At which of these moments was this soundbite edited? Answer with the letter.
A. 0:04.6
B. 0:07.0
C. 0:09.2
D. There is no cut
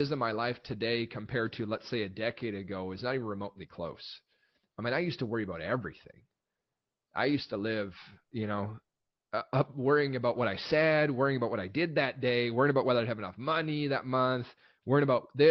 D